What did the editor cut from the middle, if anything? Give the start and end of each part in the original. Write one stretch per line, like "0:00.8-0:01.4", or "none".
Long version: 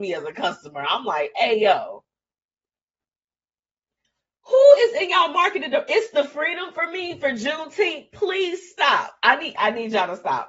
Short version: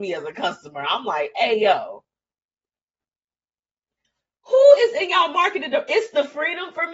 none